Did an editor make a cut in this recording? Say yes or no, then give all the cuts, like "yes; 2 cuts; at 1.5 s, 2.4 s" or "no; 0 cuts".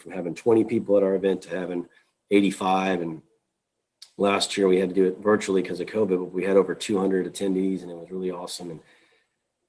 no; 0 cuts